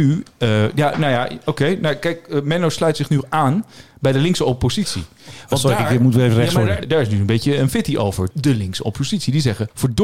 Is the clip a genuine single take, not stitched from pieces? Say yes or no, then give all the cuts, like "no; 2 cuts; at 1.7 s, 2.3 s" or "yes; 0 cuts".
yes; 0 cuts